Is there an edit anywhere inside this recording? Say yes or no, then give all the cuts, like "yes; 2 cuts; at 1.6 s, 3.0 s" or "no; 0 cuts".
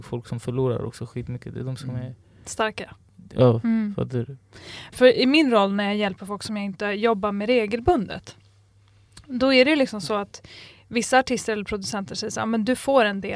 yes; 1 cut; at 4.9 s